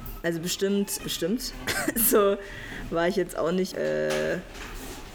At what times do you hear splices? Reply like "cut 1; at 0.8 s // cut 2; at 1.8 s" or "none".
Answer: cut 1; at 1.0 s // cut 2; at 3.7 s